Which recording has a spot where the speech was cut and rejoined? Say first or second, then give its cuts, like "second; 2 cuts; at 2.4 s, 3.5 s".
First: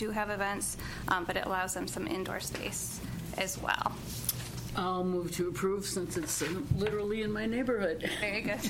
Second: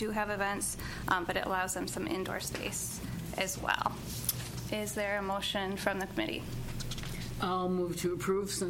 first; 1 cut; at 4.7 s